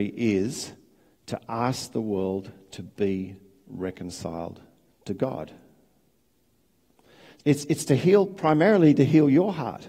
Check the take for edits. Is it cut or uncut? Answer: cut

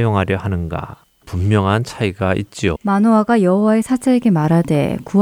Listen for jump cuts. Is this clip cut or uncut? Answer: cut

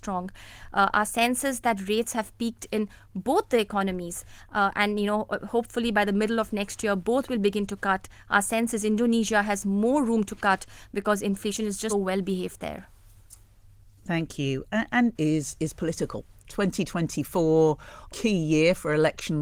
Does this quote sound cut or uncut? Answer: cut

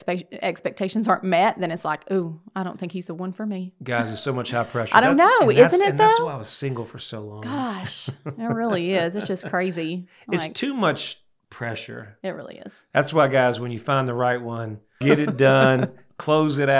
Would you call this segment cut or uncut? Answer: cut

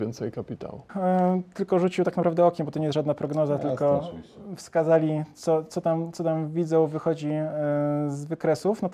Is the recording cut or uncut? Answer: uncut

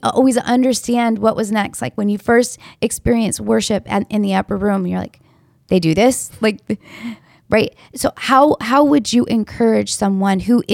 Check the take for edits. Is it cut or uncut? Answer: uncut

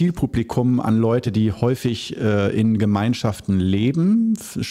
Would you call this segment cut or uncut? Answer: uncut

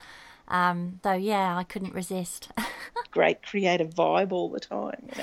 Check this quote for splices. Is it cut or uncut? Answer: cut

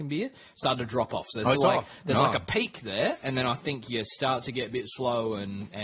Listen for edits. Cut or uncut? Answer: cut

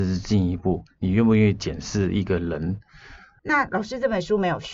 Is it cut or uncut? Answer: cut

